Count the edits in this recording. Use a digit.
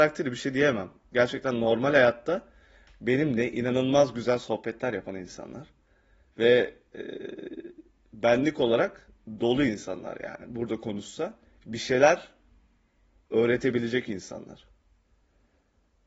0